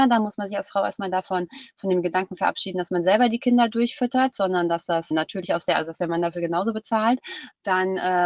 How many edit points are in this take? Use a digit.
1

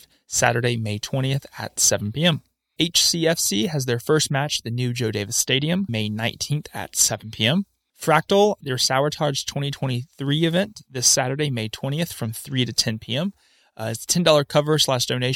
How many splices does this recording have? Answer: 1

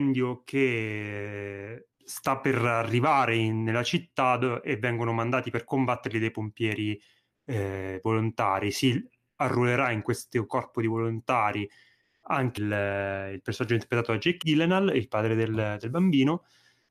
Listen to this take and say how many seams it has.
2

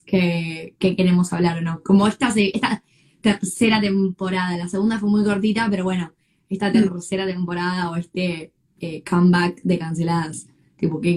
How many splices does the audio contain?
0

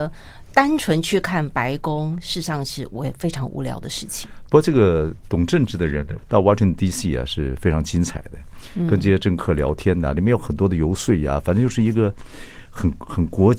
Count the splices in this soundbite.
1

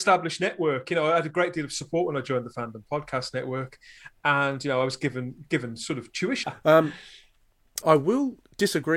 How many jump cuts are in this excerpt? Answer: 2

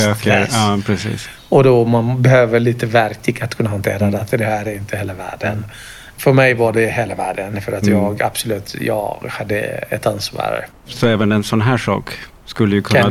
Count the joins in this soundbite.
2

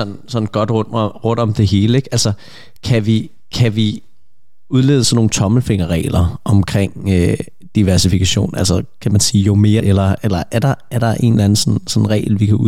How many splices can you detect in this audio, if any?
1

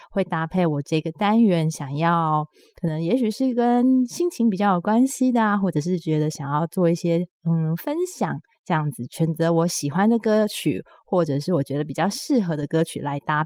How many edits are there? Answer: 0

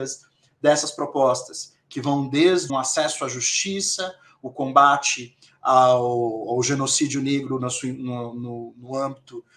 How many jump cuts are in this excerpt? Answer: 1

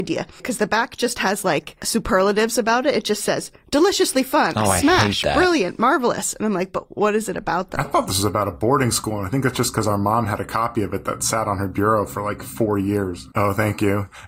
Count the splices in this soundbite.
1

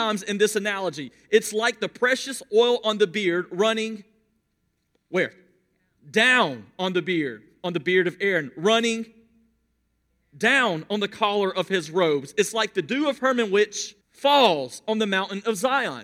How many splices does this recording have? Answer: 1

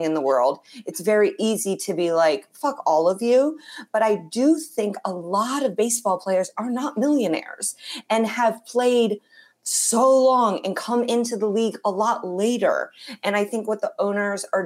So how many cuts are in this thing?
0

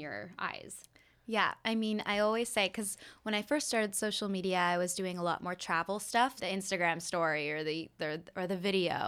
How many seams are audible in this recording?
1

